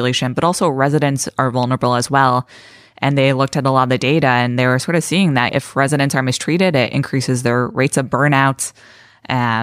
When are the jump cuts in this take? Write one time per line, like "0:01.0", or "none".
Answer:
0:05.5